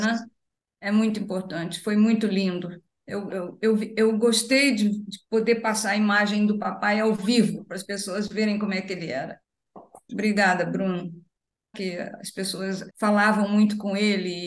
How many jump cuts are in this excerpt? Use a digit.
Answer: 3